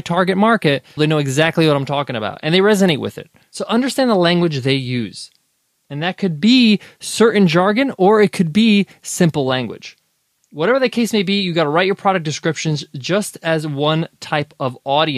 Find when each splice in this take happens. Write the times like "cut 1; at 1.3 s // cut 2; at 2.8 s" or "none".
cut 1; at 1.0 s